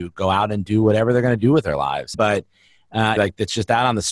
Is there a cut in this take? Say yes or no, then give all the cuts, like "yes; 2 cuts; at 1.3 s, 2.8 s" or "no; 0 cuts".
yes; 2 cuts; at 2.1 s, 3.2 s